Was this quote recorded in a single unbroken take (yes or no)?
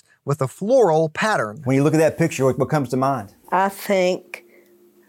yes